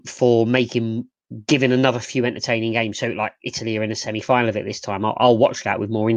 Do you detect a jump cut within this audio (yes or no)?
no